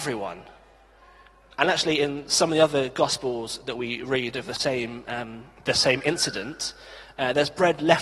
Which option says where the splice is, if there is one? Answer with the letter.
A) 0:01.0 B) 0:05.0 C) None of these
C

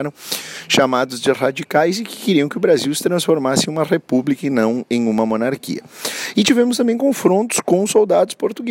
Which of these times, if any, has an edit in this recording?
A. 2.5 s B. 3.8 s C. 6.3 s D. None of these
D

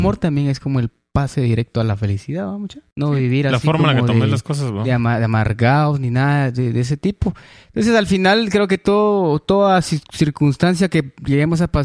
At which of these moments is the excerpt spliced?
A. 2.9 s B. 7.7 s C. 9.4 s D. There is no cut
A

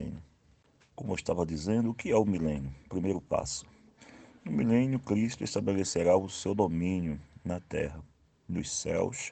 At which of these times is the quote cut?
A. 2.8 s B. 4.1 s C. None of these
C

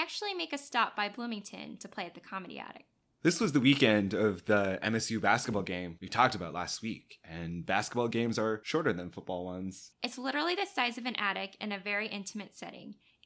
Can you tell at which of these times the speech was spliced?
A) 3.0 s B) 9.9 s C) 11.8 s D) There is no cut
B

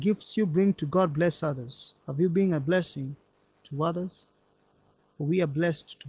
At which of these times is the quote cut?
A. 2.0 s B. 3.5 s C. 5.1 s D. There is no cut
A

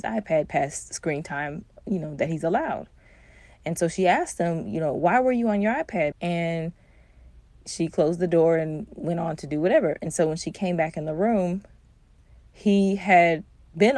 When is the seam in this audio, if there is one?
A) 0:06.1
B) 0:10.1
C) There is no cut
A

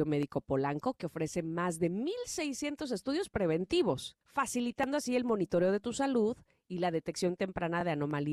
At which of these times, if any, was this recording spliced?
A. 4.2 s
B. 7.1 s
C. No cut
A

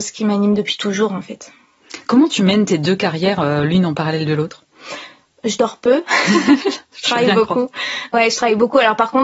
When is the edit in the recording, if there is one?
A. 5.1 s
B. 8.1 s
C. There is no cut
C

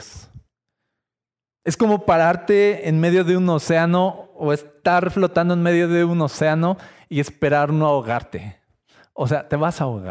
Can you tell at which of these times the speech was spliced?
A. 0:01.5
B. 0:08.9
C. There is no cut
C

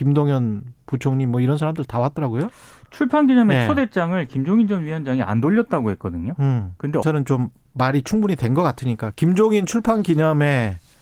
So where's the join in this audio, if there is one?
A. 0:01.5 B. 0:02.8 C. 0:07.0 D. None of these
C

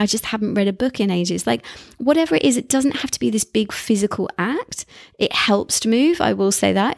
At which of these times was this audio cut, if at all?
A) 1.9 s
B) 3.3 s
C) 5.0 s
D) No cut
D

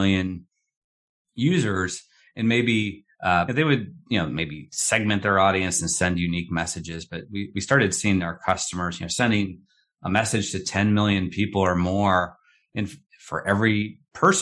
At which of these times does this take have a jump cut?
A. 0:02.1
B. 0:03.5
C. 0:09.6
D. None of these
B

